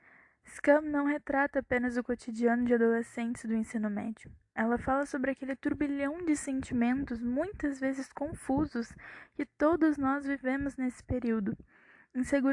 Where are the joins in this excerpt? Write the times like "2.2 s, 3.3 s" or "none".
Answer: none